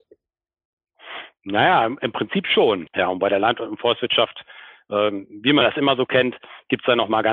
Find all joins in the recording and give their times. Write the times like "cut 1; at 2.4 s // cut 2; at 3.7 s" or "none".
cut 1; at 2.9 s